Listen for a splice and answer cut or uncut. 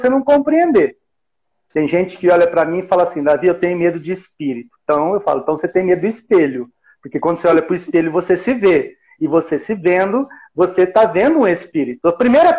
uncut